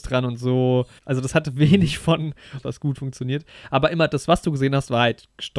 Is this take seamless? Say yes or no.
no